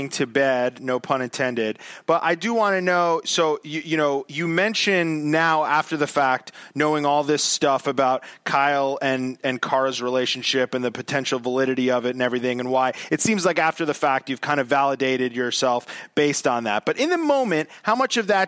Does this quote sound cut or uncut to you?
uncut